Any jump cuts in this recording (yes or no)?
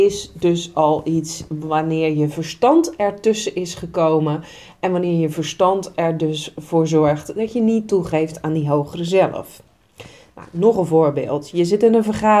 no